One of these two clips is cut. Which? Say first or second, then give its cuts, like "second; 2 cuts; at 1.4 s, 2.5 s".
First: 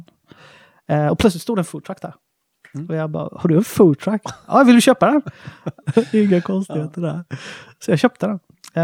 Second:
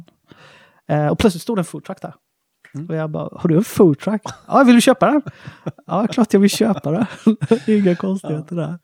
first; 1 cut; at 5.8 s